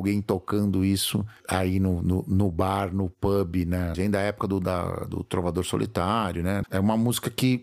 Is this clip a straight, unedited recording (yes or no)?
no